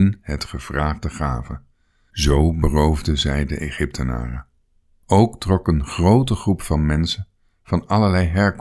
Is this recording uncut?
no; 1 cut; at 5.0 s

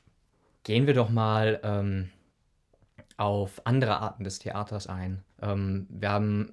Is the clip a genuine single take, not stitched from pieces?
no; 1 cut; at 5.3 s

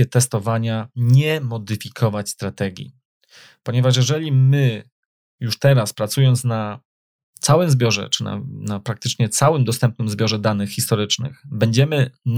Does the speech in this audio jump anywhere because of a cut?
no; 0 cuts

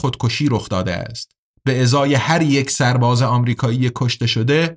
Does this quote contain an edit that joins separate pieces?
yes; 1 cut; at 1.5 s

